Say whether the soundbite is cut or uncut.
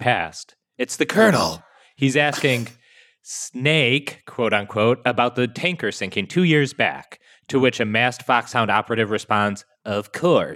uncut